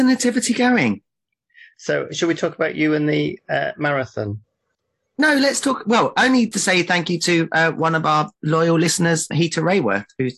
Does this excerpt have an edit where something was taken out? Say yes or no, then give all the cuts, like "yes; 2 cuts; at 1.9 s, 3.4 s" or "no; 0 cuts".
yes; 1 cut; at 9.3 s